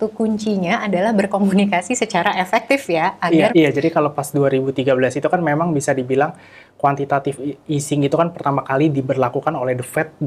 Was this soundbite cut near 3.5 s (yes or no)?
yes